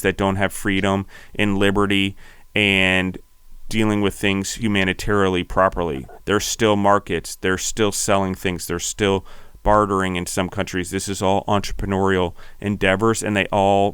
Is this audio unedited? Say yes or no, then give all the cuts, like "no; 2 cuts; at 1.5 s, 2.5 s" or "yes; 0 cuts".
yes; 0 cuts